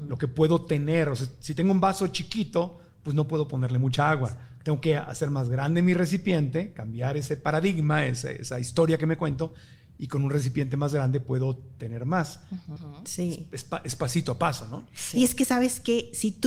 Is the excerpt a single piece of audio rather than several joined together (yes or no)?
no